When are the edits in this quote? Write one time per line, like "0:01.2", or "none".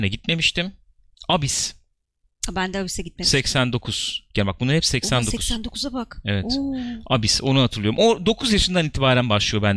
none